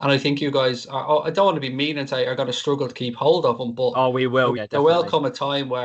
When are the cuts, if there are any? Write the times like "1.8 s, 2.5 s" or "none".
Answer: 4.6 s